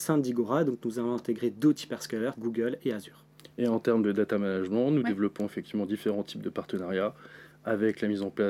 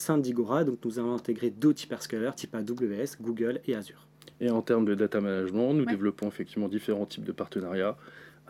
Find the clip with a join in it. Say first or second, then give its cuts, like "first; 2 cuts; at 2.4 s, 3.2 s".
first; 1 cut; at 2.3 s